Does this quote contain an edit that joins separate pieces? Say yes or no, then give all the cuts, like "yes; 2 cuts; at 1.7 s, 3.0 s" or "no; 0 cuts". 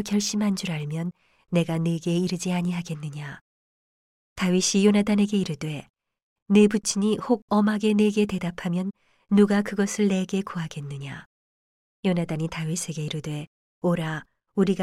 no; 0 cuts